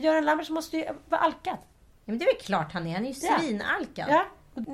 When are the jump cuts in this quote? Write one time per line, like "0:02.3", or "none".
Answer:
none